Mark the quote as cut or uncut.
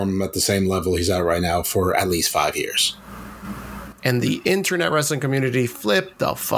cut